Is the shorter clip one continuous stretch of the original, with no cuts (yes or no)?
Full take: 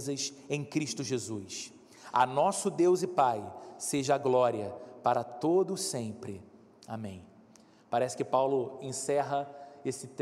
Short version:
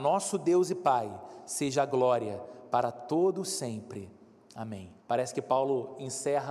no